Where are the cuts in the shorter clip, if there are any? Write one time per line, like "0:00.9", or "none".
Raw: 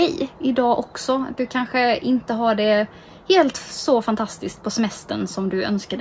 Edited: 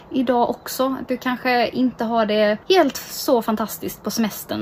0:02.6